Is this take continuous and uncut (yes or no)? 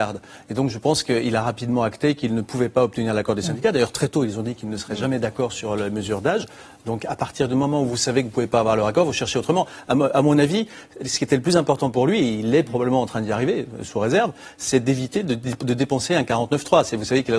yes